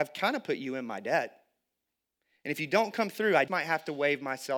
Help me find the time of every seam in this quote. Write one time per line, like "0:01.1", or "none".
0:03.5